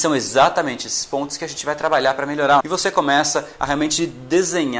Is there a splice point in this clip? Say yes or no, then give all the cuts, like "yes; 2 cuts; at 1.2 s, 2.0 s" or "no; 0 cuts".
yes; 1 cut; at 2.6 s